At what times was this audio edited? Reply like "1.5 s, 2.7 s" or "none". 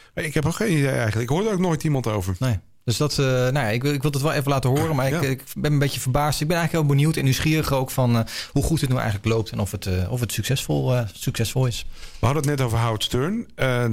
none